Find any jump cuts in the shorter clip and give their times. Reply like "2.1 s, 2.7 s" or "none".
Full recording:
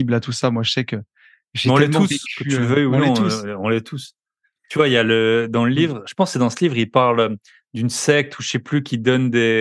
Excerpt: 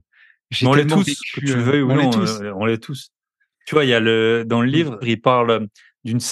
5.0 s